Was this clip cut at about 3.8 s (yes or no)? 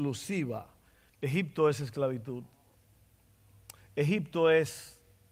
no